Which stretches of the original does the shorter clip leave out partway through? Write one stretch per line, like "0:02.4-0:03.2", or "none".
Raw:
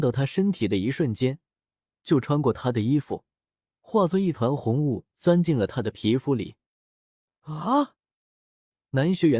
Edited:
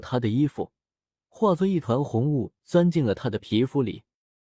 none